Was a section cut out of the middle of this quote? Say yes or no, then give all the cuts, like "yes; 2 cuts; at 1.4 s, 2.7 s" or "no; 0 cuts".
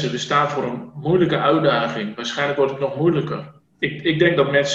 yes; 1 cut; at 3.6 s